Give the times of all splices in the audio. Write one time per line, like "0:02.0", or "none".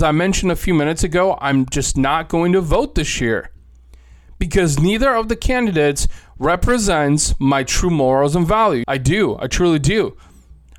0:08.8